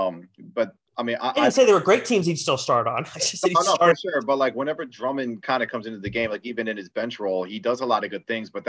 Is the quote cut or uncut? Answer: uncut